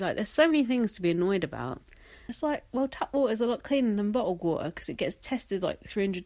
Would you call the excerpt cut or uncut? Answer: cut